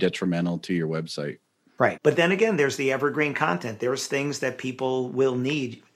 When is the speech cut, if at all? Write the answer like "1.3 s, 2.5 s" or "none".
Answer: 2.0 s